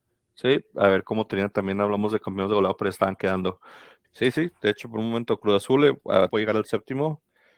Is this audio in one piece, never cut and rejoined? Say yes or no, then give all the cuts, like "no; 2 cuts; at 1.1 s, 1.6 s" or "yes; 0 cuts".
no; 2 cuts; at 4.0 s, 6.3 s